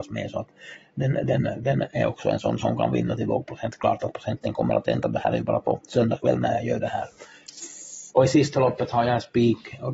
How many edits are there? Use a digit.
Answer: 1